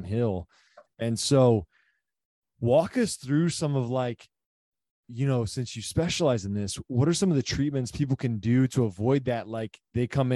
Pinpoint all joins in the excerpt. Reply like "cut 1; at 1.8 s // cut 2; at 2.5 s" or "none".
none